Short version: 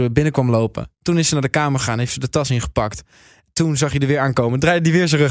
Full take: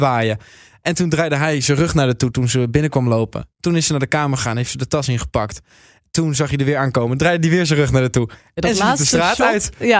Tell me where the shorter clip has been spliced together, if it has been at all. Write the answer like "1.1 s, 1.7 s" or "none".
none